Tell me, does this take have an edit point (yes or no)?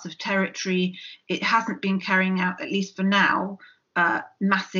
no